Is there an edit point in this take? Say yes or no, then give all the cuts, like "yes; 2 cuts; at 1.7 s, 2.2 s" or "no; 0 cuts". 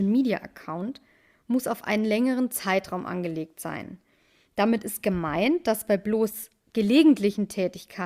no; 0 cuts